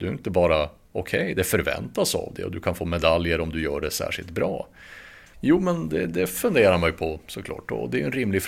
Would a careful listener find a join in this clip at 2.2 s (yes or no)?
no